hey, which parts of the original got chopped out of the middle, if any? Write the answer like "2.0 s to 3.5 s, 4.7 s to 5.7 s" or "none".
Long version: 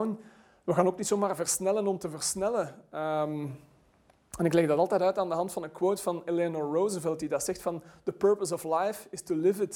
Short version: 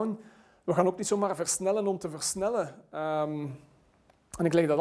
none